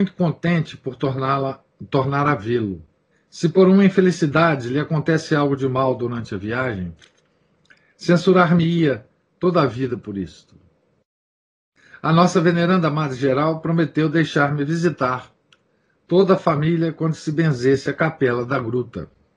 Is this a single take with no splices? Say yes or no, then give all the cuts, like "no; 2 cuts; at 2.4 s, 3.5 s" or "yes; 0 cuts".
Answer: no; 1 cut; at 3.1 s